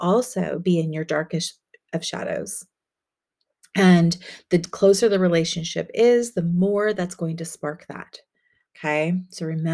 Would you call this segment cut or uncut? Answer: uncut